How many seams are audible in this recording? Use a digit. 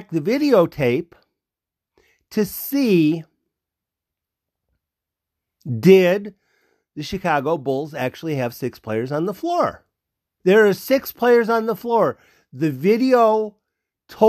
1